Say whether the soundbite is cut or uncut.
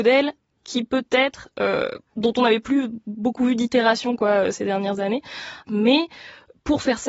cut